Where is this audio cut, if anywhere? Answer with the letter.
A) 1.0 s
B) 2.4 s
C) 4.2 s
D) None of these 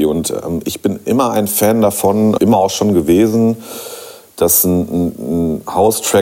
B